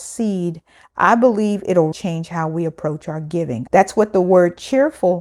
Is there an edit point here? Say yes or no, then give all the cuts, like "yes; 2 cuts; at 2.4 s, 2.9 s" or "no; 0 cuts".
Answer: yes; 2 cuts; at 1.9 s, 3.7 s